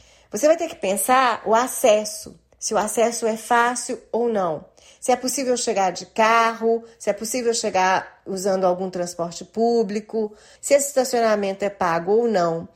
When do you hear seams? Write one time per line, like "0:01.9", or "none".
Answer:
0:10.6